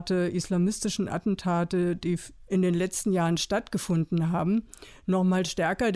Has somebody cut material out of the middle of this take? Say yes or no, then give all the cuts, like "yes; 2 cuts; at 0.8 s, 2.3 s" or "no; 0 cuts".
no; 0 cuts